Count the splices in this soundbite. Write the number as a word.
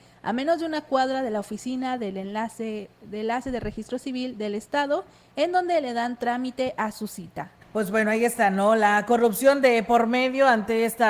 zero